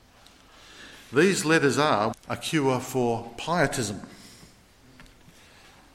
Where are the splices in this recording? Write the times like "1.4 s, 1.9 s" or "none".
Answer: 2.1 s